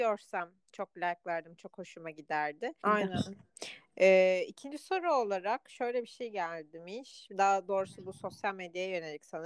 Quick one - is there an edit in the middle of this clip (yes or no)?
yes